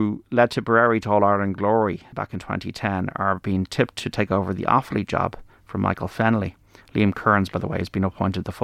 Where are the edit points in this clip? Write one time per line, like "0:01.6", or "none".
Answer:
0:02.1